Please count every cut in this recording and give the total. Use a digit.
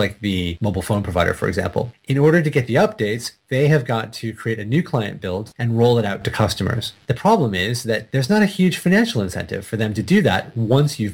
1